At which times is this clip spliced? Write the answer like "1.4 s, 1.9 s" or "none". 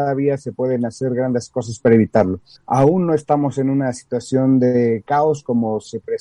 2.5 s